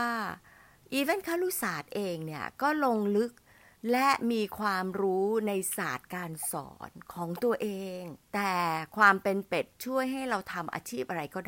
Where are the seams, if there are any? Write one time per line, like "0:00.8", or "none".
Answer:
0:08.2